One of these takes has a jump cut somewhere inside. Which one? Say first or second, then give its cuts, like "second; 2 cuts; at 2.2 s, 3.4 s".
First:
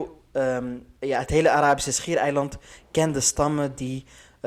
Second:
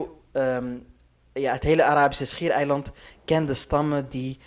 first; 1 cut; at 1.0 s